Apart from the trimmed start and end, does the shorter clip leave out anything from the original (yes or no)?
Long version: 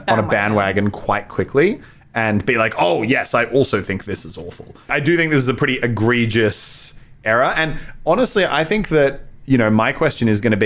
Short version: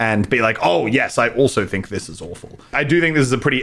no